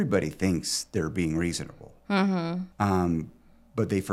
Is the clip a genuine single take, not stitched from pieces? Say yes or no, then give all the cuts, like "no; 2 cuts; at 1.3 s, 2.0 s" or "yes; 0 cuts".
no; 1 cut; at 2.7 s